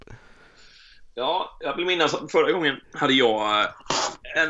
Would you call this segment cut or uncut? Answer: cut